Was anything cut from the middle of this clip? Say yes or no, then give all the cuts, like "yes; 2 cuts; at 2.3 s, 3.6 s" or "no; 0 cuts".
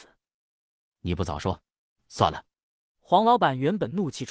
yes; 1 cut; at 2.0 s